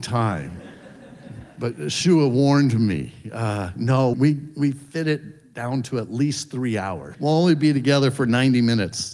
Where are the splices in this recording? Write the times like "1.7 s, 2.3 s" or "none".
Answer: 4.1 s, 7.1 s